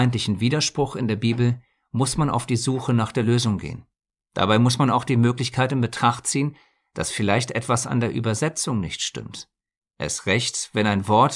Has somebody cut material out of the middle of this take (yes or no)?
no